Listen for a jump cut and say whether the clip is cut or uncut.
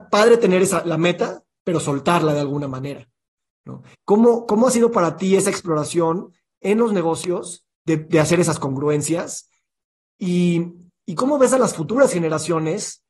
cut